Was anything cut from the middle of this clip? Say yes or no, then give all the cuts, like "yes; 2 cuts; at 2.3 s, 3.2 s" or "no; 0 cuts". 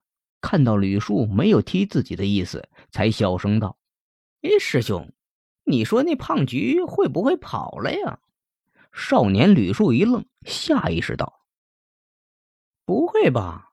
no; 0 cuts